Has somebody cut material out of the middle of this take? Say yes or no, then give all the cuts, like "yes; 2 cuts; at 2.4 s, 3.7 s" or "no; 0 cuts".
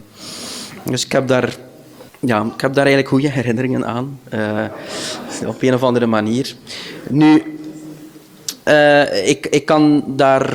yes; 1 cut; at 2.1 s